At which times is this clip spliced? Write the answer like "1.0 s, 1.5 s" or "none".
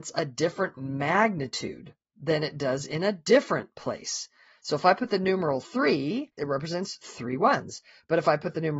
6.4 s